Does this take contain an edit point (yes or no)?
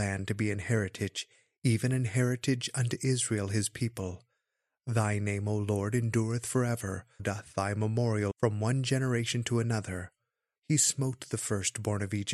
yes